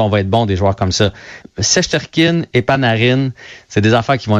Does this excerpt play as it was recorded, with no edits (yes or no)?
no